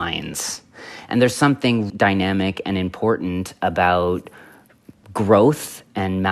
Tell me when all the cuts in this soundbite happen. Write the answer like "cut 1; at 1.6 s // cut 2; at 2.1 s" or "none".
cut 1; at 1.9 s